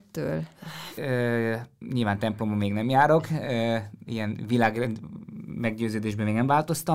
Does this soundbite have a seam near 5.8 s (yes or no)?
no